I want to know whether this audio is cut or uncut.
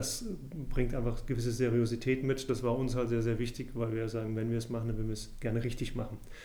uncut